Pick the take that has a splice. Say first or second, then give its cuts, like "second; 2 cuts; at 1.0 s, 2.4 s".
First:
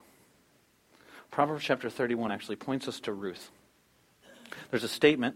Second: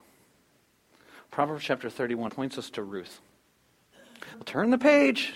second; 2 cuts; at 2.3 s, 4.3 s